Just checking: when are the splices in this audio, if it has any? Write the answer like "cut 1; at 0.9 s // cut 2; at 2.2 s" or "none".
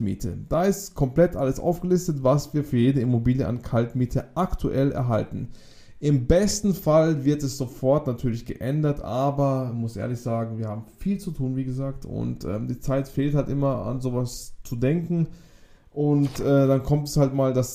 none